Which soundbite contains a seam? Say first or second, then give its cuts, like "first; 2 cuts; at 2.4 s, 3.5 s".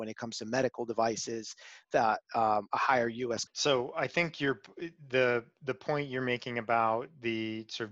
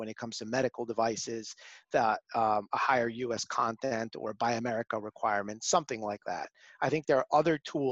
first; 1 cut; at 3.5 s